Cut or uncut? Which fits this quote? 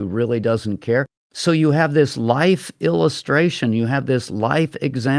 cut